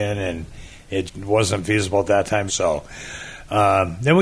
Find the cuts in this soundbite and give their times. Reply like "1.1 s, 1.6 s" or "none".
1.1 s, 2.5 s